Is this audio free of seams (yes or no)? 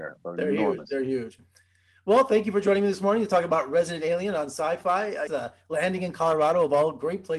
no